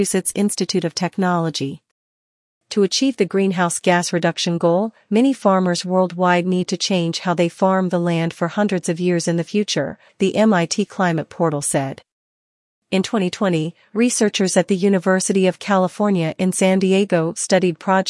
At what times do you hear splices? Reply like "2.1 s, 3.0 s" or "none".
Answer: 10.1 s